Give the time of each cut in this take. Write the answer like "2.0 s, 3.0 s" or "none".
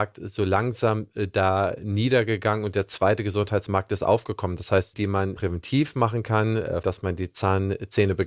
4.9 s, 6.8 s